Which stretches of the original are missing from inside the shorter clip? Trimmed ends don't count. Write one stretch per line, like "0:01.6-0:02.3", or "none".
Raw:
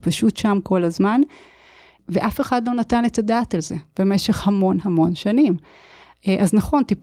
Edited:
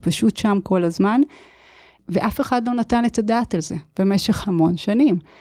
0:04.4-0:04.8